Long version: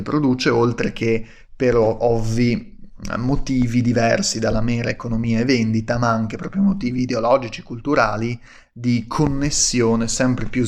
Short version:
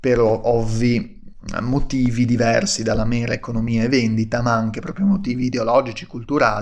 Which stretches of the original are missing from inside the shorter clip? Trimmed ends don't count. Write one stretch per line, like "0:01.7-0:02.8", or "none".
none